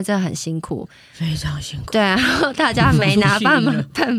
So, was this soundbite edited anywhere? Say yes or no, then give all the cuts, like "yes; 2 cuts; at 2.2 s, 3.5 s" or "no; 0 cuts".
no; 0 cuts